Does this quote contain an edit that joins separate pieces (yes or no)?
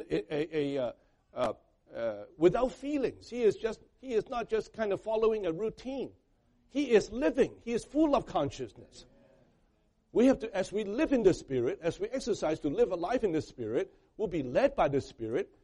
no